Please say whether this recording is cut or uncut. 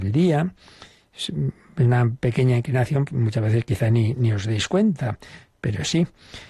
cut